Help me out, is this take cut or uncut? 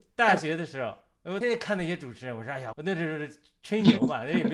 cut